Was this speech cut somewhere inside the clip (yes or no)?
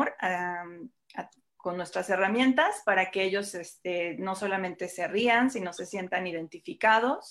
no